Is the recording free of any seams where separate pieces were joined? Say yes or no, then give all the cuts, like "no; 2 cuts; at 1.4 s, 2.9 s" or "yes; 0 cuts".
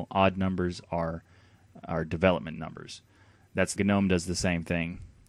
no; 1 cut; at 3.8 s